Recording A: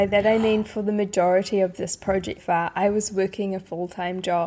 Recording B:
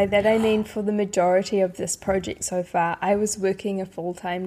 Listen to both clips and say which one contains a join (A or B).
A